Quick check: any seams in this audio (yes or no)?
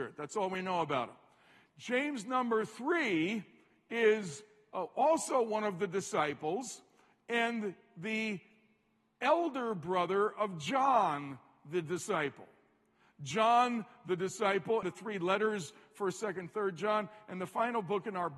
yes